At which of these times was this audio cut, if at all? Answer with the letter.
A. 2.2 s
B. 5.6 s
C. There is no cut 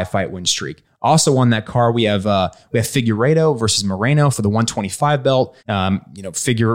B